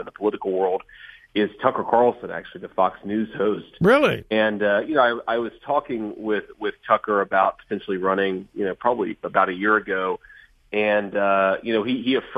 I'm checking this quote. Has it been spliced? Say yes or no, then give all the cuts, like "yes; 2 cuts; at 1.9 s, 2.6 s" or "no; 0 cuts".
no; 0 cuts